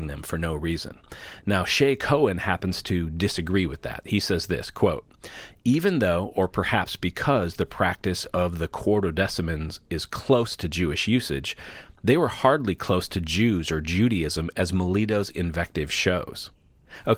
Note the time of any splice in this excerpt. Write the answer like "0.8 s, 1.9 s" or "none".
none